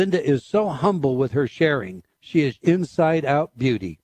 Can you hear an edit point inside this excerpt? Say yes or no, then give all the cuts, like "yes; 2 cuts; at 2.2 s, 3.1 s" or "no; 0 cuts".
yes; 1 cut; at 2.6 s